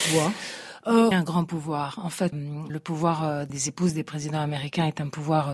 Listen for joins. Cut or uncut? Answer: cut